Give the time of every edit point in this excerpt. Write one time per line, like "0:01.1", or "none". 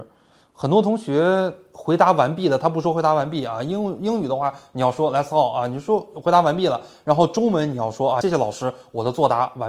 0:08.2